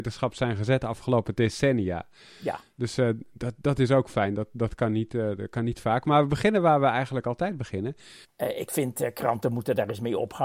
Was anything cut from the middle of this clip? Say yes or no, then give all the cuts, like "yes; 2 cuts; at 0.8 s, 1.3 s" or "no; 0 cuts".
yes; 1 cut; at 8.2 s